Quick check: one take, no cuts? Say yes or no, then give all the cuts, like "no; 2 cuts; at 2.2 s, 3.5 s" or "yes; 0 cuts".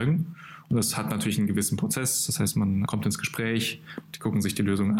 no; 2 cuts; at 2.9 s, 4.0 s